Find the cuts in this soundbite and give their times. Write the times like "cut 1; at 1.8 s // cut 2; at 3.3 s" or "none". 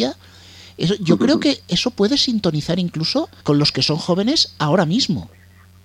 cut 1; at 3.4 s